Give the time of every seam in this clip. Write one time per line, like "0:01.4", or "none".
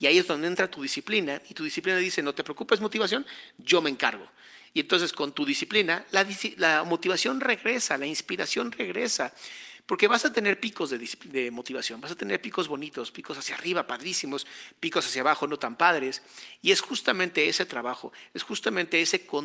none